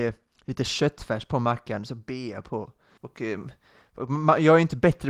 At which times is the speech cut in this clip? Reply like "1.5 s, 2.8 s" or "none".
3.0 s